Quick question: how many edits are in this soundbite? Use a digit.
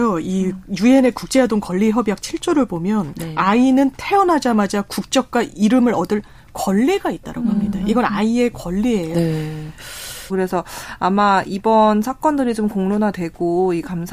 2